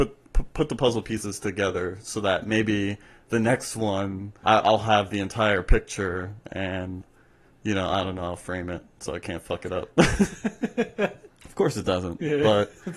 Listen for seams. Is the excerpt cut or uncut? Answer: cut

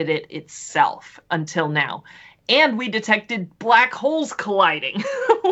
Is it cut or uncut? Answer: uncut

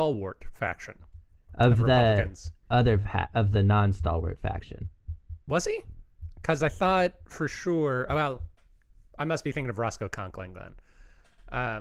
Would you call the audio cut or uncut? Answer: uncut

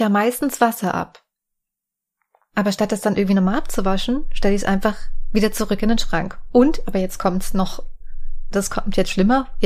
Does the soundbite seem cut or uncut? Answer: cut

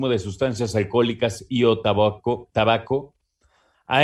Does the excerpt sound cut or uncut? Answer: uncut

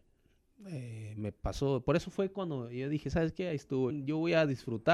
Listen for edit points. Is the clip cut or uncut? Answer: cut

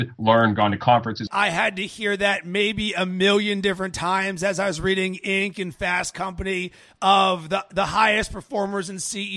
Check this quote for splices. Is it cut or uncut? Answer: cut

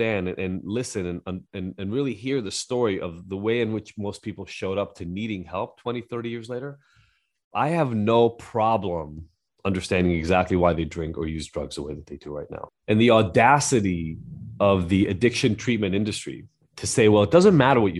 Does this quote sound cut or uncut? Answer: uncut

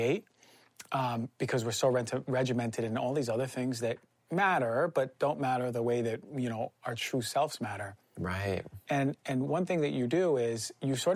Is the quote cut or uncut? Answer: uncut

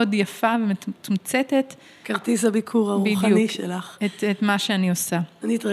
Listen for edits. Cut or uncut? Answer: uncut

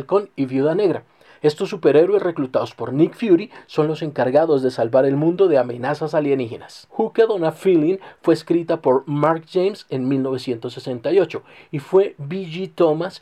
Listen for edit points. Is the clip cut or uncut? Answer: cut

